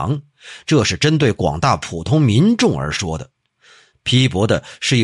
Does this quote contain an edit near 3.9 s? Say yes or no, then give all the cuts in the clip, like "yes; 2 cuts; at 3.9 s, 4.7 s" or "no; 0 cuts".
yes; 1 cut; at 3.9 s